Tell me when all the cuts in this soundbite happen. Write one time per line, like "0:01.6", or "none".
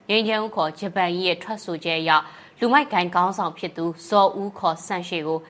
none